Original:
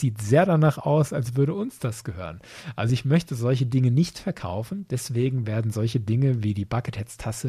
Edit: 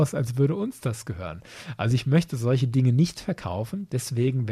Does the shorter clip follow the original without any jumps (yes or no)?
yes